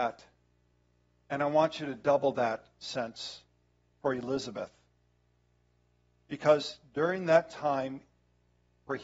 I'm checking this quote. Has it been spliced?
no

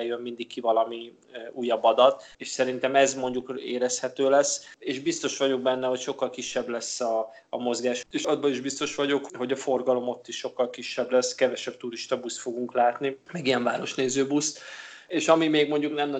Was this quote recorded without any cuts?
no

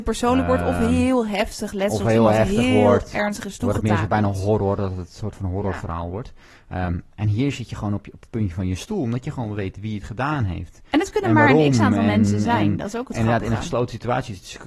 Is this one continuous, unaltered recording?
yes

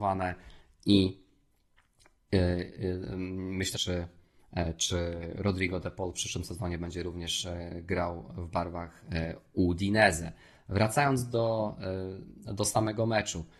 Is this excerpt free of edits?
no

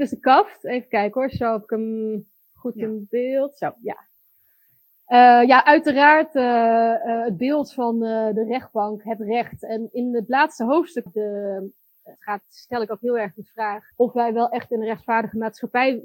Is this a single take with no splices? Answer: no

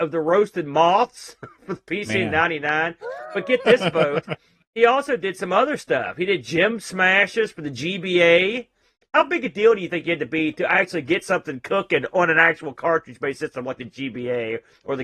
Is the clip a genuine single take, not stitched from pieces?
no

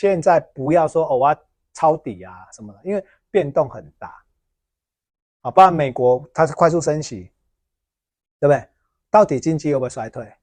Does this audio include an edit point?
no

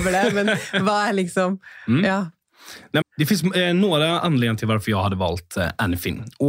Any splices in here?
yes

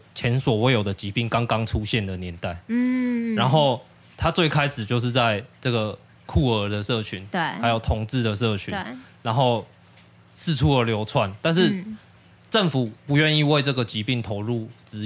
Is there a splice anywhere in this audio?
no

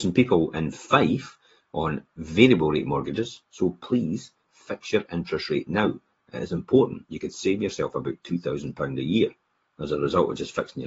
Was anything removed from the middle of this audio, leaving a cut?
yes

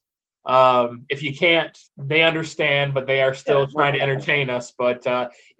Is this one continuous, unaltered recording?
no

